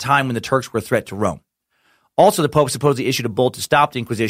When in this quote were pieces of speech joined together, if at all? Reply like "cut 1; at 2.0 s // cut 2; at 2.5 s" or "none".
none